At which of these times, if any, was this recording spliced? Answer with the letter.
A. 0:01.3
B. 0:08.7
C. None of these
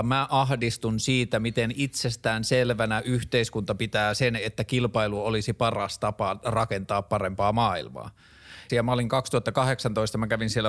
B